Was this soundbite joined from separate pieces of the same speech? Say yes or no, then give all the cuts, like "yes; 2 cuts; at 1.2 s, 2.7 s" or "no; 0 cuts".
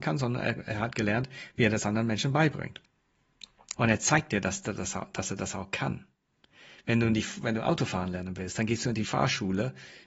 yes; 1 cut; at 3.7 s